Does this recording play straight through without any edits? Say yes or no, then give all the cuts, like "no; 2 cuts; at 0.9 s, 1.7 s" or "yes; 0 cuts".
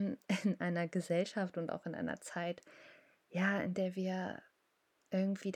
yes; 0 cuts